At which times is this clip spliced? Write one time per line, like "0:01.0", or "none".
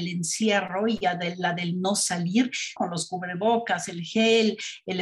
0:02.8